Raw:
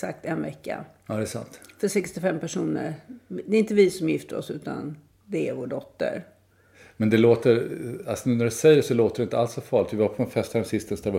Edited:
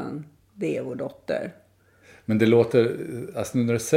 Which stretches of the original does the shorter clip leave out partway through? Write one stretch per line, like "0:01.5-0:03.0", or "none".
none